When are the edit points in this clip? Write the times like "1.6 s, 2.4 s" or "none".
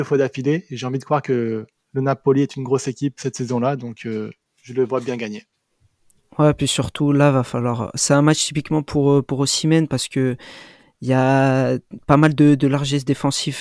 none